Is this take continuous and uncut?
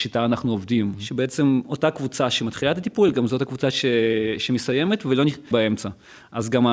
no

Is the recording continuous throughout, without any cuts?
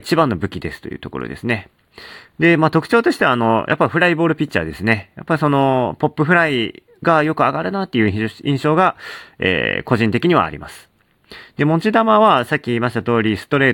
yes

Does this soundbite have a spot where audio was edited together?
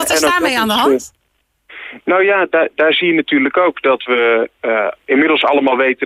no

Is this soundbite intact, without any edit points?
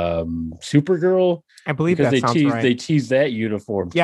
yes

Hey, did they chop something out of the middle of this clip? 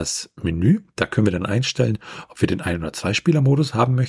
no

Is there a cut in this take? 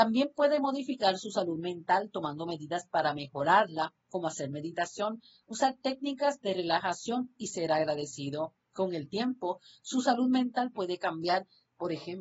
no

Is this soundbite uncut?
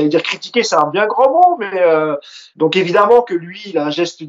no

